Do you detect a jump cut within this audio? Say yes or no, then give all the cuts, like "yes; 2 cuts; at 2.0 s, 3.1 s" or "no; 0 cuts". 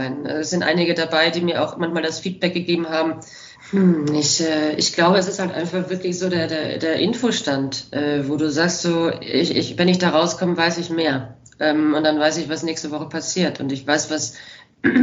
yes; 1 cut; at 3.6 s